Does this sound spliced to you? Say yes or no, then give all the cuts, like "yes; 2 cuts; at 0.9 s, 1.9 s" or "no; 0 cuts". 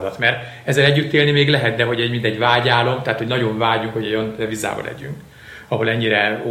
no; 0 cuts